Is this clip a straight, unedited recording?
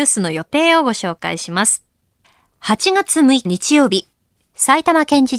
no; 1 cut; at 3.4 s

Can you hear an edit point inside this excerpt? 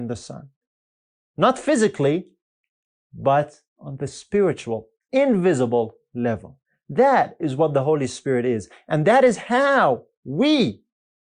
no; 0 cuts

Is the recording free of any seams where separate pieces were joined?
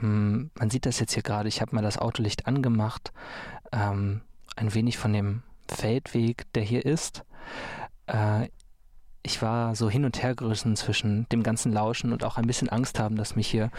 yes; 0 cuts

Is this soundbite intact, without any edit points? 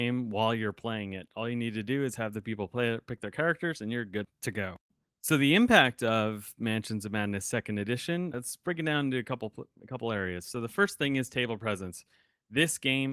no; 1 cut; at 8.3 s

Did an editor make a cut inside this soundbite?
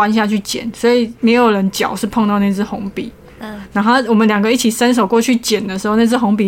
no; 0 cuts

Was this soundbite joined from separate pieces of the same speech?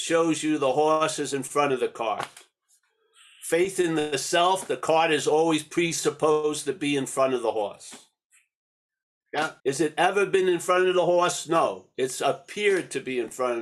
yes; 1 cut; at 9.6 s

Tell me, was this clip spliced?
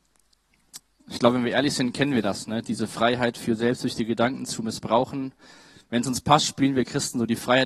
no; 0 cuts

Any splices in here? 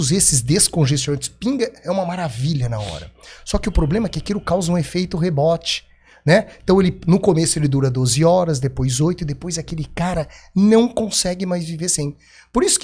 no; 0 cuts

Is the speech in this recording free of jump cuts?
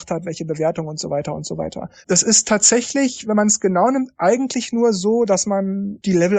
no; 1 cut; at 2.0 s

